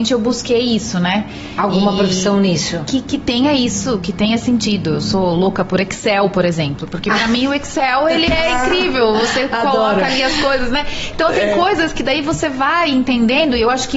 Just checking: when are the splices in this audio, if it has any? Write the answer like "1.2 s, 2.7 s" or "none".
none

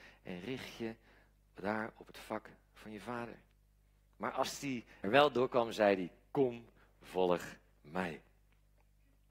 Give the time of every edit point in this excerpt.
5.0 s

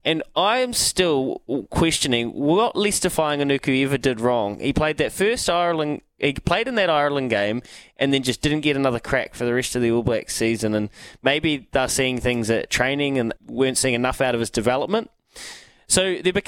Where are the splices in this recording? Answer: 13.4 s

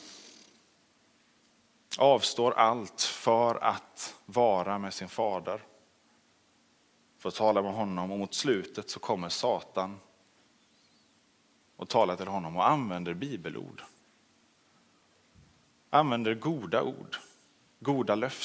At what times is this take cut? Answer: none

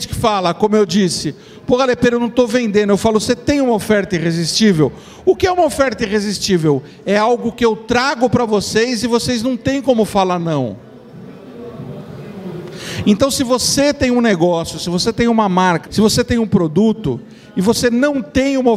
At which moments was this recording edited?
15.9 s

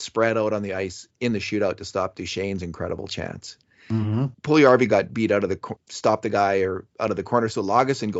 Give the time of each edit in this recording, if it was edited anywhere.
4.3 s, 5.8 s

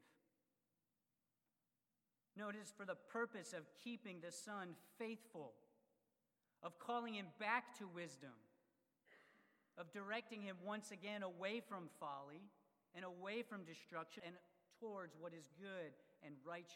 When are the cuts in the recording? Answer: 14.2 s

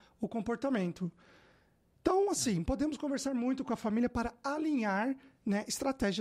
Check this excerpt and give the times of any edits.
none

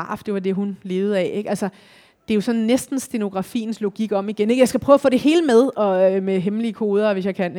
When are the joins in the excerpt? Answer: none

